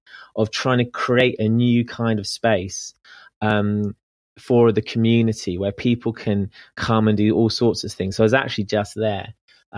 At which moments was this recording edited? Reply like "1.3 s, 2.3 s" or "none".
none

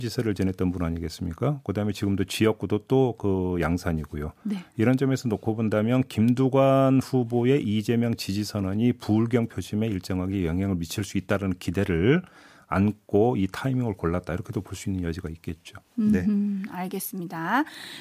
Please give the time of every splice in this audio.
none

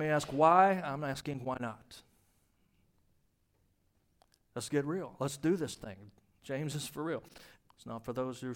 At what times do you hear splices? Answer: 7.5 s

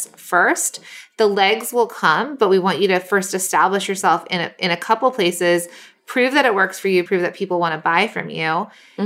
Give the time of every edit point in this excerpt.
7.1 s

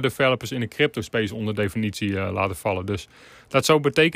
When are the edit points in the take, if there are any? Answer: none

